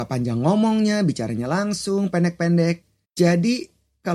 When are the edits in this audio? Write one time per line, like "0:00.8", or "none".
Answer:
0:03.0